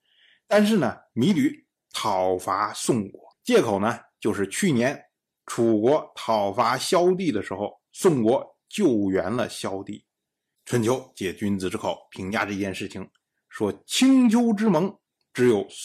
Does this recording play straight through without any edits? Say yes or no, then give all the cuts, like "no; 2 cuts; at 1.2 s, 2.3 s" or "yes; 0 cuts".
no; 2 cuts; at 1.1 s, 3.3 s